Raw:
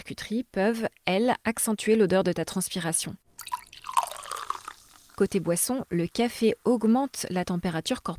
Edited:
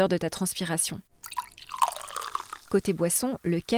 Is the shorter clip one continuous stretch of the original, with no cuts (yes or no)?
no